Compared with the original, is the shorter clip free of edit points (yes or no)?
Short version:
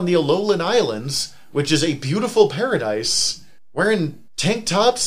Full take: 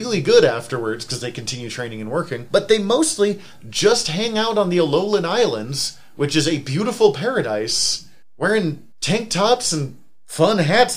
yes